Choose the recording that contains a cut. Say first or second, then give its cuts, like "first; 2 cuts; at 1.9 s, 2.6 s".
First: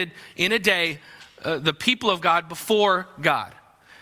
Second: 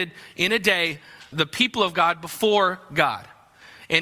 second; 1 cut; at 1.3 s